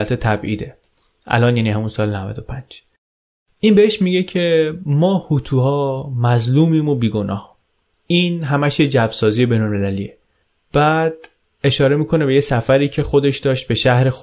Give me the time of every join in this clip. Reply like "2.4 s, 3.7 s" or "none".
none